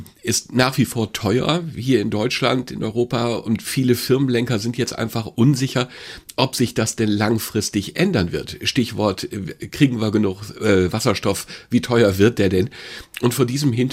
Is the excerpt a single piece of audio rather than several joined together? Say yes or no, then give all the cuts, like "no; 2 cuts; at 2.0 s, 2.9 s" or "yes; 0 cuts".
yes; 0 cuts